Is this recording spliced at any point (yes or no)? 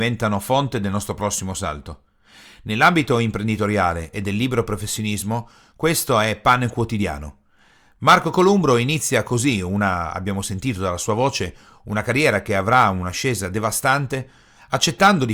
no